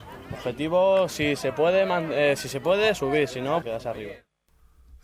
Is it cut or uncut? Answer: cut